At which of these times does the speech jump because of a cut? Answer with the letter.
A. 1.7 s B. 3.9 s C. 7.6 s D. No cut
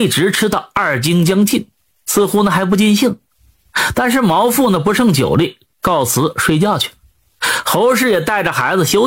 D